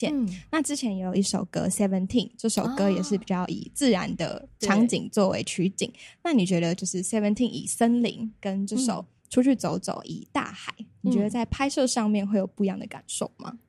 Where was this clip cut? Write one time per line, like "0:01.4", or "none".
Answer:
0:04.5

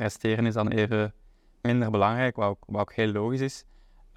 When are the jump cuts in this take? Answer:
none

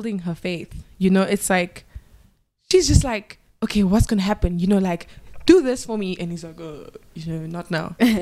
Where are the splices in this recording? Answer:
0:06.2

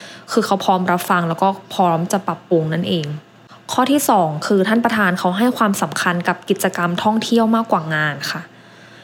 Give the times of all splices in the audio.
none

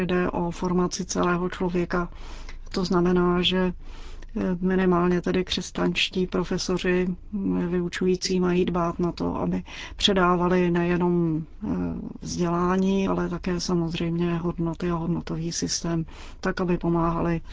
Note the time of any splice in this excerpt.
0:13.1

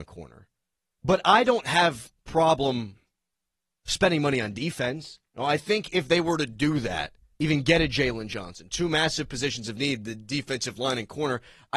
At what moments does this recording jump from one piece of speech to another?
0:05.3
0:07.3

